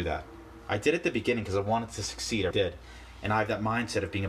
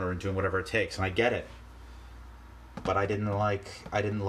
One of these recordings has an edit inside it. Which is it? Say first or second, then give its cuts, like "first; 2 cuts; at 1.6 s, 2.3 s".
first; 1 cut; at 2.5 s